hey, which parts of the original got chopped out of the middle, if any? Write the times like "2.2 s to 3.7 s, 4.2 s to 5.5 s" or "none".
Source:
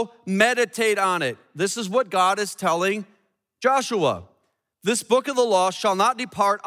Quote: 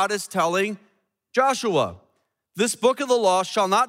none